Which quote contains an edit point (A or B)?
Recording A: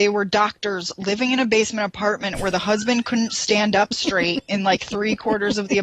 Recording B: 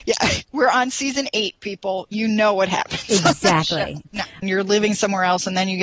B